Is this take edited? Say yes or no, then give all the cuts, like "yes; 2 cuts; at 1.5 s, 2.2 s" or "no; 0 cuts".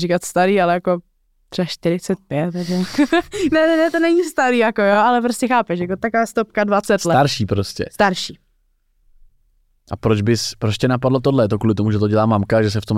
no; 0 cuts